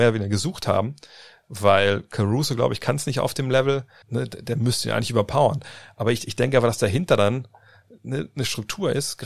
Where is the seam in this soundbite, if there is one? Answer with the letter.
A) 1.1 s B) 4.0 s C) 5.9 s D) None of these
B